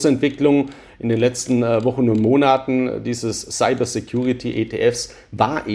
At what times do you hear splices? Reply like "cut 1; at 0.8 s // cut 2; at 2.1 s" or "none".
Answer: none